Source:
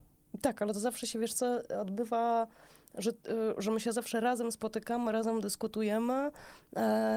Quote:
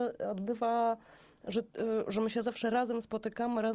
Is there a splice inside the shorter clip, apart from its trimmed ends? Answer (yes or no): no